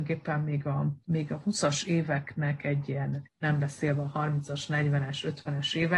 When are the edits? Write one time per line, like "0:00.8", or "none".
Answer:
0:01.0
0:03.2